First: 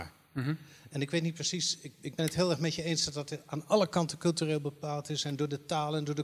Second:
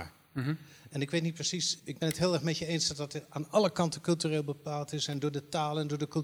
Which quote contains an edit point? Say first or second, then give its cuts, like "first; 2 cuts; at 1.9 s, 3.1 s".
second; 1 cut; at 1.8 s